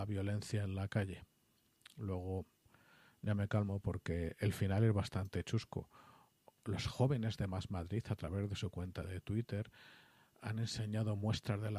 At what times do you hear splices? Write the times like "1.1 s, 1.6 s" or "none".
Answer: none